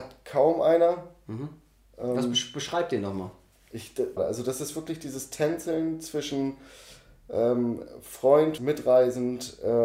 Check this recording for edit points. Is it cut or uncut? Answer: cut